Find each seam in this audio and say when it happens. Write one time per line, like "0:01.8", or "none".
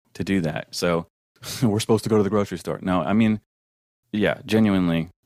none